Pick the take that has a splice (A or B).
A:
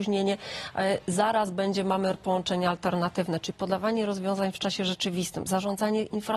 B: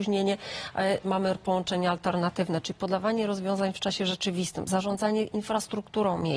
B